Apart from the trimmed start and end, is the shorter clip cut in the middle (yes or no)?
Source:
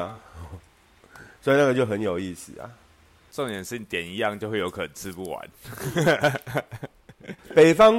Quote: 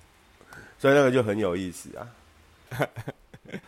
yes